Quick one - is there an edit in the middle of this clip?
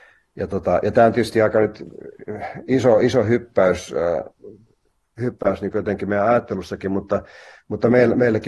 no; 0 cuts

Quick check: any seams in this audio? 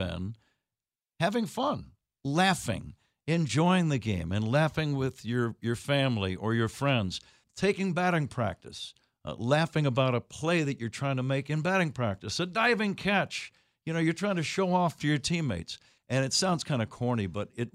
yes; 2 cuts; at 7.4 s, 16.0 s

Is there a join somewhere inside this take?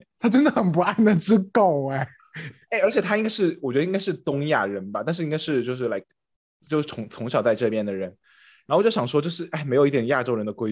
no; 0 cuts

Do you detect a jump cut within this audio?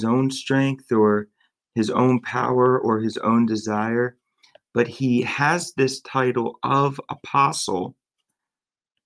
no; 0 cuts

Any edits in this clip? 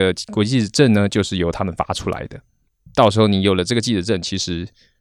no; 0 cuts

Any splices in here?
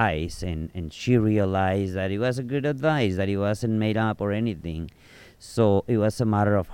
no; 0 cuts

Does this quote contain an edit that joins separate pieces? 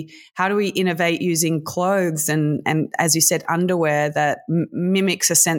no; 0 cuts

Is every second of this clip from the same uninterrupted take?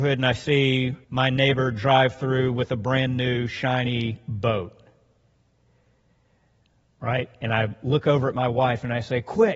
no; 1 cut; at 1.0 s

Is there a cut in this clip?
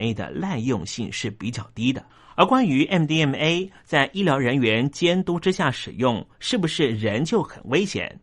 no; 0 cuts

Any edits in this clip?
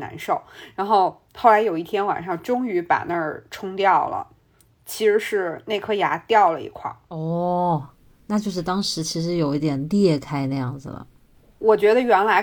no; 0 cuts

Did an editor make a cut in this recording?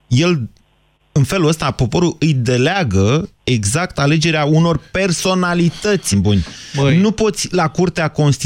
yes; 1 cut; at 6.1 s

